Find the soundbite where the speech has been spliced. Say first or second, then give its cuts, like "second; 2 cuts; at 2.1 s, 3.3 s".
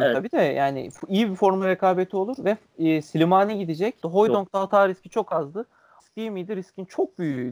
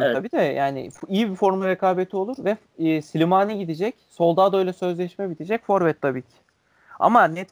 first; 2 cuts; at 4.0 s, 6.0 s